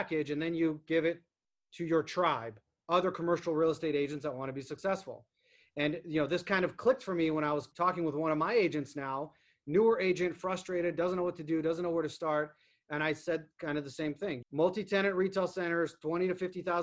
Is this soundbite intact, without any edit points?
no; 1 cut; at 14.4 s

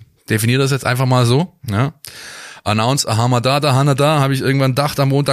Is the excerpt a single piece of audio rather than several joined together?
yes; 0 cuts

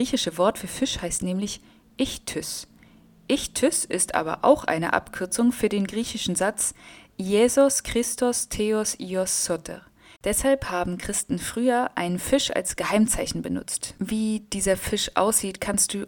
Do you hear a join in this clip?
yes; 1 cut; at 10.2 s

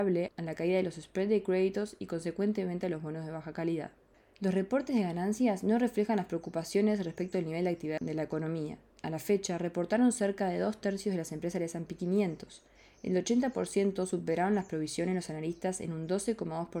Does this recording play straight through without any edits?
yes; 0 cuts

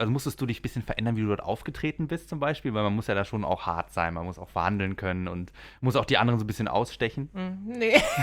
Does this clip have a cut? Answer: no; 0 cuts

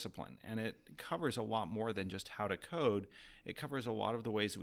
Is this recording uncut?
yes; 0 cuts

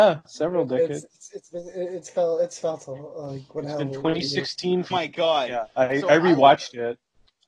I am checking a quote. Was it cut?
yes; 1 cut; at 4.9 s

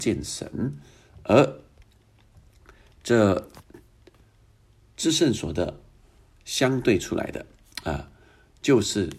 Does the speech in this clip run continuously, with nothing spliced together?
yes; 0 cuts

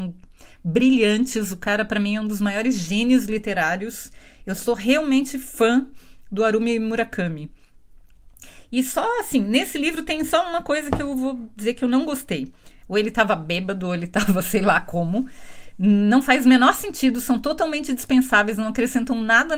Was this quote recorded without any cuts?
no; 1 cut; at 12.8 s

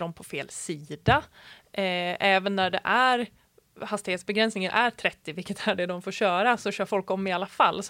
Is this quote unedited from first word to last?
yes; 0 cuts

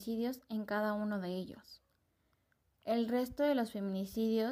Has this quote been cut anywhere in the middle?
no; 0 cuts

